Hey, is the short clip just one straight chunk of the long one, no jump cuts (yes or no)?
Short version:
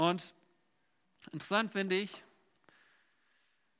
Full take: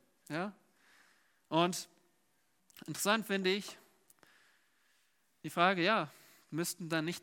yes